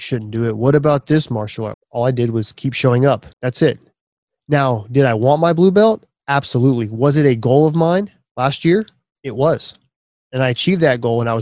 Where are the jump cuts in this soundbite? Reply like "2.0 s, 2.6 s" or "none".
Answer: 1.7 s, 3.3 s

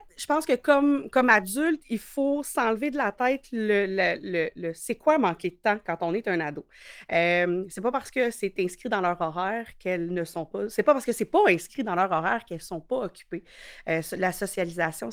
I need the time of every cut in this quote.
none

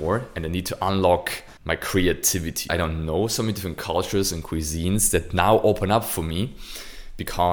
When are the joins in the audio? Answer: 1.6 s, 2.7 s

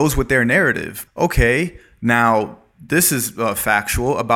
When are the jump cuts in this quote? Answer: 1.0 s

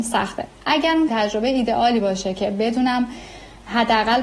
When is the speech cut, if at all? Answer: 1.1 s

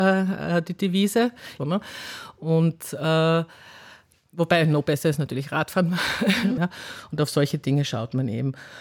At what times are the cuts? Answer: 1.6 s, 6.6 s

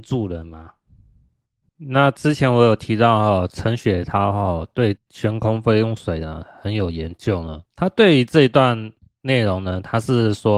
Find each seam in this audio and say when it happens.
1.7 s, 7.7 s

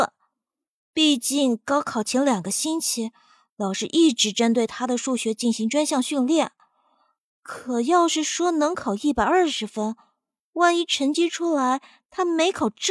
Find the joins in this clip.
none

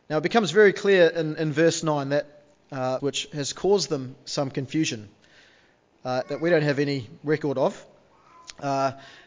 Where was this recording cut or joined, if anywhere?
3.0 s, 6.2 s

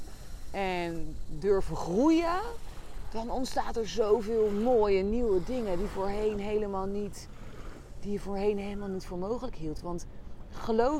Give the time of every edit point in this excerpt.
none

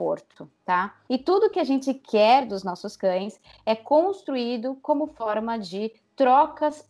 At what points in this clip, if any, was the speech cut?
1.1 s

